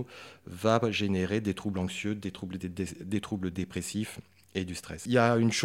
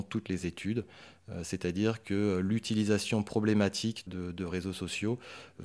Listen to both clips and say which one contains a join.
second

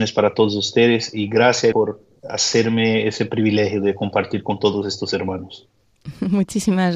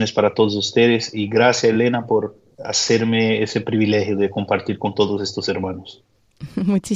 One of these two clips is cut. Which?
first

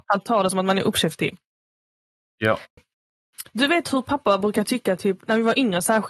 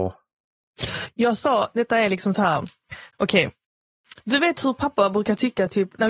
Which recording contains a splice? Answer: first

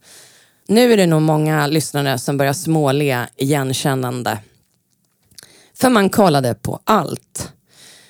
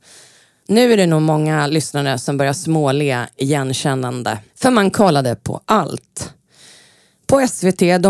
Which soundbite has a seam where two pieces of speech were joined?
second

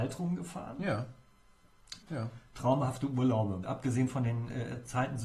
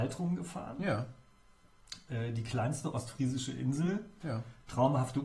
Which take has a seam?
first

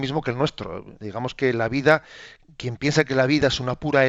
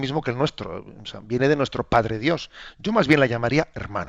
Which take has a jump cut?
first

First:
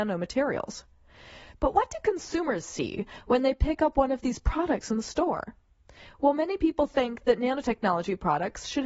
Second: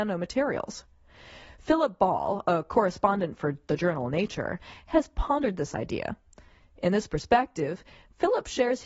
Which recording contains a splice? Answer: first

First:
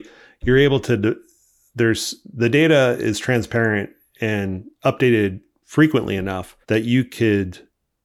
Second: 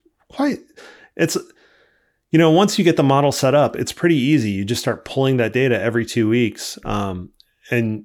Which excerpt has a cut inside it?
first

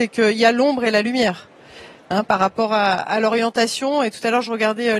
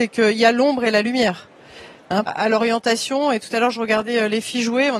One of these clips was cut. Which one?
second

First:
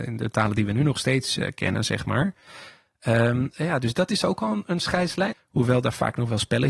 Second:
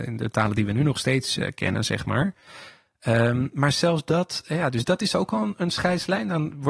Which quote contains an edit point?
first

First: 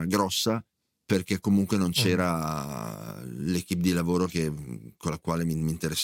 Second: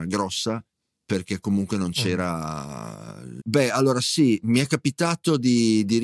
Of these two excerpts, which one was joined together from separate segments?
second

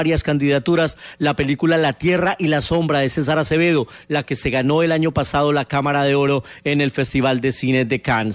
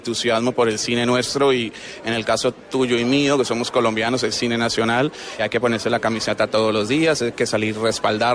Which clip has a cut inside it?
second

